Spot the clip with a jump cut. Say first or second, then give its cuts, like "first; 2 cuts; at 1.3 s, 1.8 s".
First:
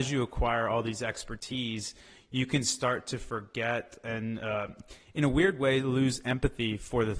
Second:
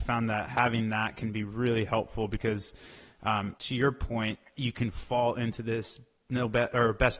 second; 1 cut; at 3.6 s